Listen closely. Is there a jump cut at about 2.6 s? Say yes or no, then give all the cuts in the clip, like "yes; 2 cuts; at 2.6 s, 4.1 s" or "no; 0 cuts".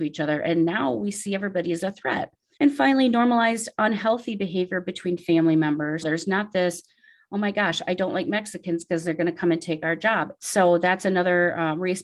yes; 3 cuts; at 2.6 s, 6.0 s, 10.4 s